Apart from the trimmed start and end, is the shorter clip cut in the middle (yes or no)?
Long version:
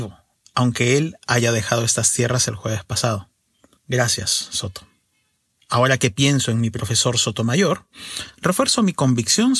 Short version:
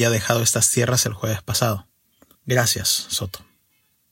no